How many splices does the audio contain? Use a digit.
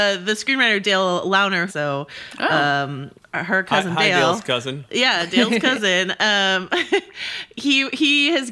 1